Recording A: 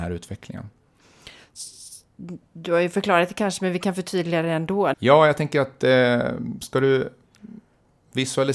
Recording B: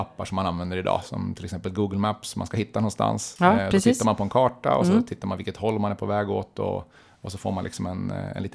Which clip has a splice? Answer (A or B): A